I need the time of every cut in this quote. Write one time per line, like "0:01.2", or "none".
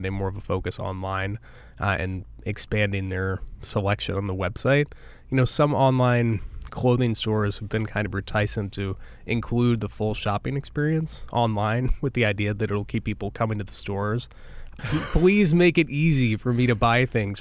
0:14.8